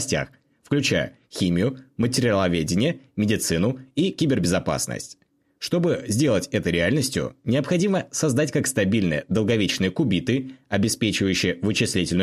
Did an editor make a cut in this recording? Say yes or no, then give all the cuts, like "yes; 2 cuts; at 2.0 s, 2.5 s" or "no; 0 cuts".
no; 0 cuts